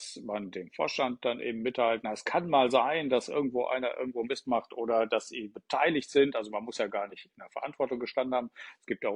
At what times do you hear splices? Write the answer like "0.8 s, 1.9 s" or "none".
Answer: none